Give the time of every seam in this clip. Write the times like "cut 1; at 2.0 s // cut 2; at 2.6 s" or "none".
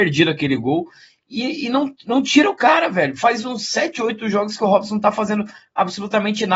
none